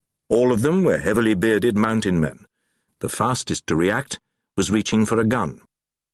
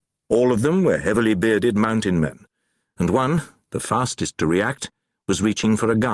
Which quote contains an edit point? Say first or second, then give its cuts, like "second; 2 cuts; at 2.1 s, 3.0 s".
first; 1 cut; at 2.9 s